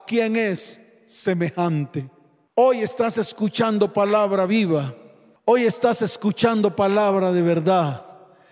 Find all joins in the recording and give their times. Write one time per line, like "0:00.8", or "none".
none